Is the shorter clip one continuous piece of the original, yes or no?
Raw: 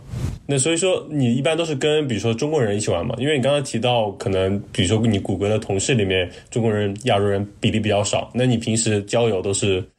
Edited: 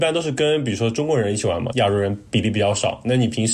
no